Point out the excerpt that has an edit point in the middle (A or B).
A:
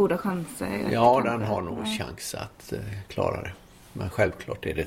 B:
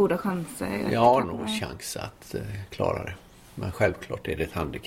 B